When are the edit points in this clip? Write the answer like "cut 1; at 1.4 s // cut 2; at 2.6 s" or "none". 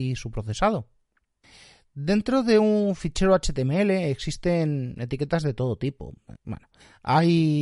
cut 1; at 6.3 s